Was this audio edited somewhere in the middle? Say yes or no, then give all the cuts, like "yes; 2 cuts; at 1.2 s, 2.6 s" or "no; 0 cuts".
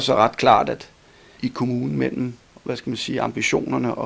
yes; 1 cut; at 1.4 s